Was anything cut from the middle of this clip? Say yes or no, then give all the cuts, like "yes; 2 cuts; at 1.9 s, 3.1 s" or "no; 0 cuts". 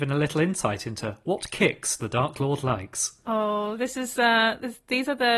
no; 0 cuts